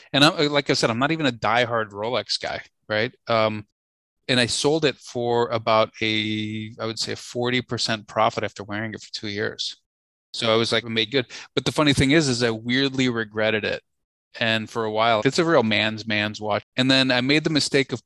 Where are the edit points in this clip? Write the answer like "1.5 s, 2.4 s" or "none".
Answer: 10.8 s, 15.2 s, 16.6 s